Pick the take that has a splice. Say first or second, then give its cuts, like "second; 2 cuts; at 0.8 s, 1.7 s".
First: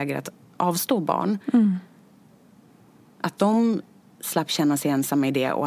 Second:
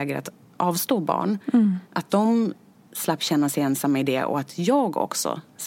second; 1 cut; at 1.8 s